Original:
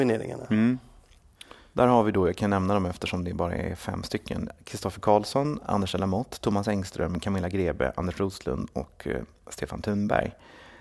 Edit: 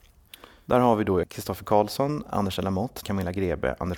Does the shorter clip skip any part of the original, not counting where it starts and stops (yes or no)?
yes